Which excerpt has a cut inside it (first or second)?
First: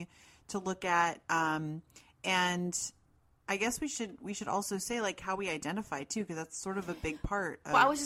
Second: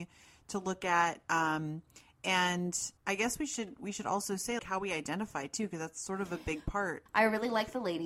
second